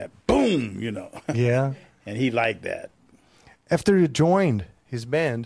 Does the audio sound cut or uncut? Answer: uncut